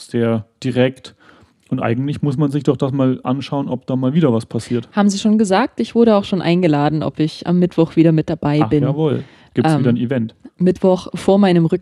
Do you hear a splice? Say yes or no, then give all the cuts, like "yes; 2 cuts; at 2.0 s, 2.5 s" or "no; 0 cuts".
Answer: no; 0 cuts